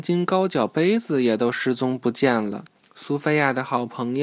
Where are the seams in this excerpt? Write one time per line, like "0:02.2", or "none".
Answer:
0:02.8